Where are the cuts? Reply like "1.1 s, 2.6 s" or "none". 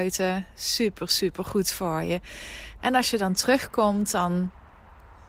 2.8 s